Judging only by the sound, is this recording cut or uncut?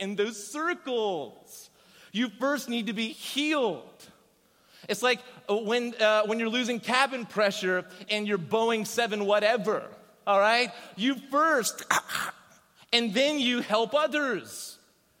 cut